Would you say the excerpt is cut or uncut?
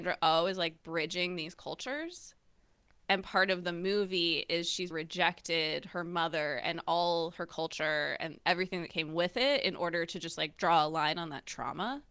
cut